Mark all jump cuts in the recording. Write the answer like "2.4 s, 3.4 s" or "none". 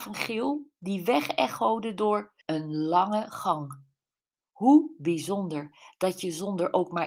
2.4 s